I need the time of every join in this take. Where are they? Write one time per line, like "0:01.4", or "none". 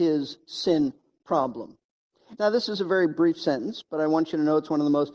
0:02.4